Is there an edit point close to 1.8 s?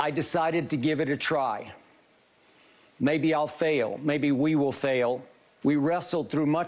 no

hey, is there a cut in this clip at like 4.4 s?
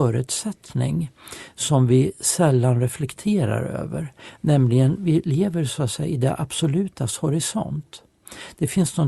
no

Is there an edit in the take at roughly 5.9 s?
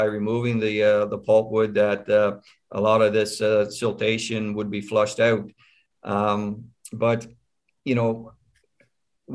no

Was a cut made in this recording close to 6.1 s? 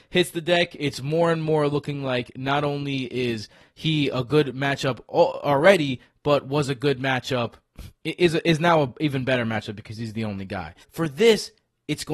no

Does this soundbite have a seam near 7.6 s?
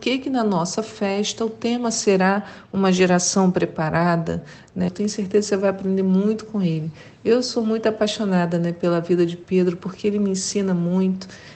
no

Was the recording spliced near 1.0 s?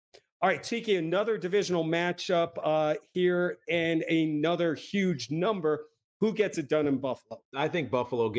no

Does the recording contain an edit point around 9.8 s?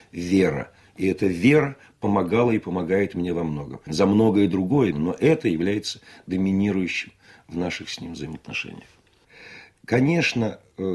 no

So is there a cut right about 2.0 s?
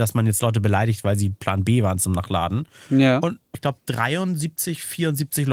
no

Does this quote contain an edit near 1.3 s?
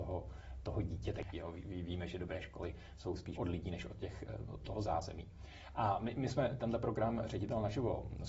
yes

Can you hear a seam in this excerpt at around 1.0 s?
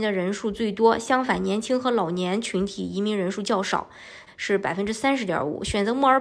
no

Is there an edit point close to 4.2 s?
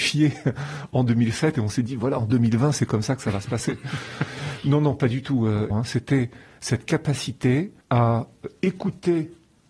no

